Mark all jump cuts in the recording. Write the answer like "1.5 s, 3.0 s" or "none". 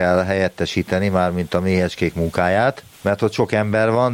2.9 s